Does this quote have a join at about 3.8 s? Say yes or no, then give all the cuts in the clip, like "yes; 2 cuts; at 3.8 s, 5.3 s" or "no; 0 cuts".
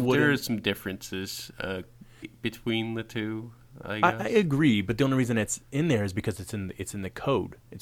no; 1 cut; at 2.2 s